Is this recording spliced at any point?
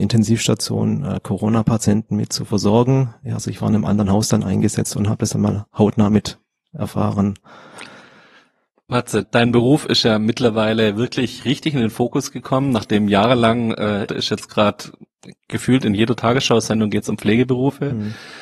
yes; 2 cuts; at 9.2 s, 14.1 s

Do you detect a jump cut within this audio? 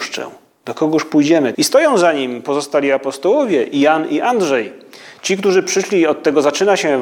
yes; 1 cut; at 1.5 s

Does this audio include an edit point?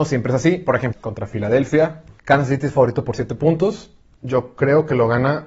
yes; 2 cuts; at 0.9 s, 2.2 s

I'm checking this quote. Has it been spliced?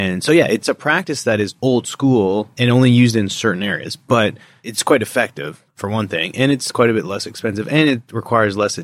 no; 0 cuts

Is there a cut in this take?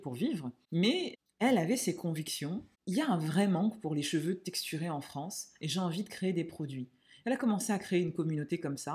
no; 0 cuts

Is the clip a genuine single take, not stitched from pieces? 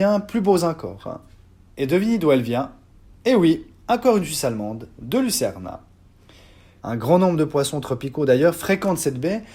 no; 2 cuts; at 1.7 s, 6.8 s

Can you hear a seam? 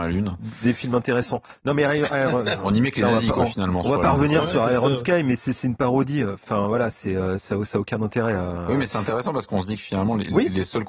no; 0 cuts

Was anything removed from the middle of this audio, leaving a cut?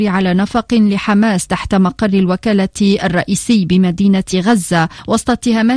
no; 0 cuts

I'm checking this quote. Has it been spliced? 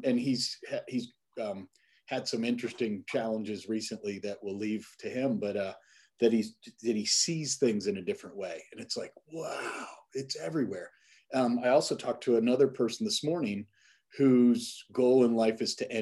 no; 0 cuts

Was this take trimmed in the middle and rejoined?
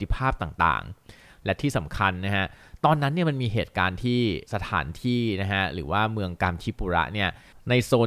yes; 1 cut; at 4.5 s

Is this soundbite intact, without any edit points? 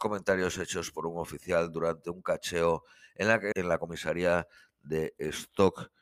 no; 1 cut; at 3.5 s

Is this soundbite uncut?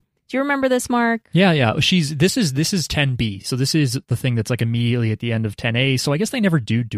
yes; 0 cuts

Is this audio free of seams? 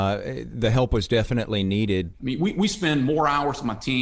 no; 1 cut; at 2.1 s

